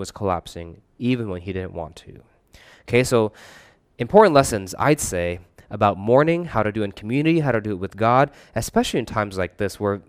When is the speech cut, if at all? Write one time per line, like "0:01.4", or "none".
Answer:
none